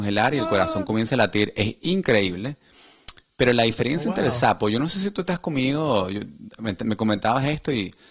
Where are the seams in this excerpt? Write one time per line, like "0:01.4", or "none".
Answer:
none